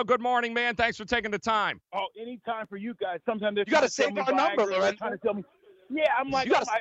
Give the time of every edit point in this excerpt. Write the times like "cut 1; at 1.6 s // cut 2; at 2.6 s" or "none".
cut 1; at 1.9 s // cut 2; at 3.2 s